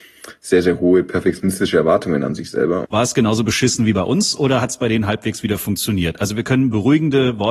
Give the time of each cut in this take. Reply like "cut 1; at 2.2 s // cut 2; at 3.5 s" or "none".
cut 1; at 2.8 s

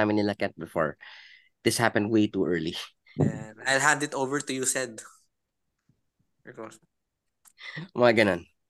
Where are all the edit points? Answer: cut 1; at 3.2 s // cut 2; at 7.5 s

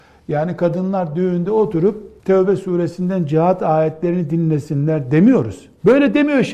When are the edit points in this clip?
cut 1; at 2.2 s

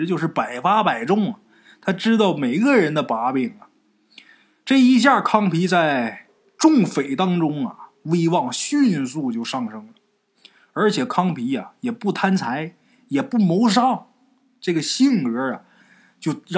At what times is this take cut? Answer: none

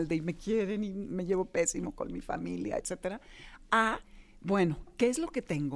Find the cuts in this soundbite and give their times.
cut 1; at 2.8 s

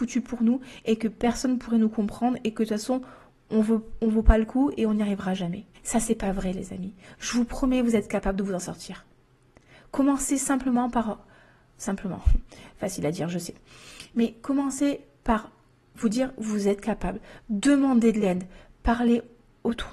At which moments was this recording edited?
cut 1; at 5.7 s

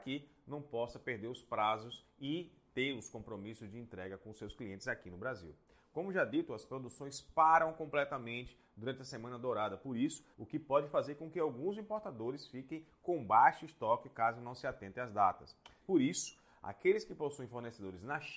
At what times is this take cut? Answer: cut 1; at 10.3 s // cut 2; at 15.8 s

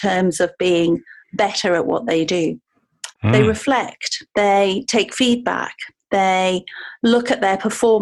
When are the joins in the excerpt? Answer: cut 1; at 3.1 s // cut 2; at 4.3 s

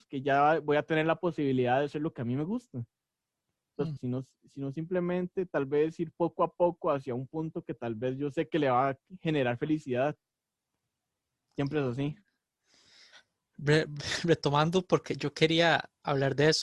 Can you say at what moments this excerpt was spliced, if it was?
cut 1; at 4.0 s

